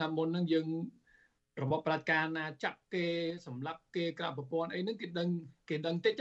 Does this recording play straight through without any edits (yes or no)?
yes